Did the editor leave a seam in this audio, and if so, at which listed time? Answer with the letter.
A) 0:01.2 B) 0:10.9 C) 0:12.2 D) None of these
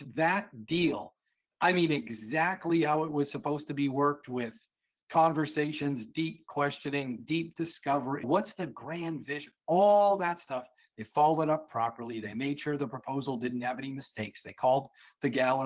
D